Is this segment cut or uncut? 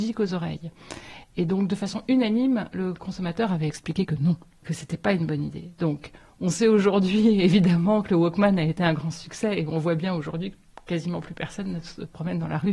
uncut